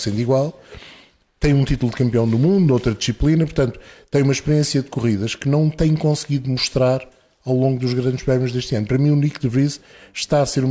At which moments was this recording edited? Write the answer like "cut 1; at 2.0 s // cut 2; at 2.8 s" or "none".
none